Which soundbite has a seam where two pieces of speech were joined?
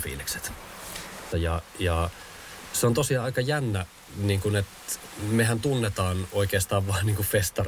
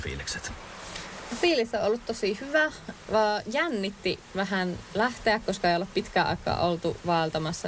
first; 1 cut; at 1.3 s

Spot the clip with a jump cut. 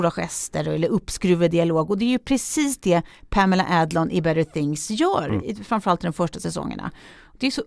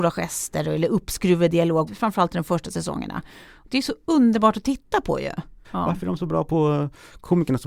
second; 2 cuts; at 1.9 s, 5.6 s

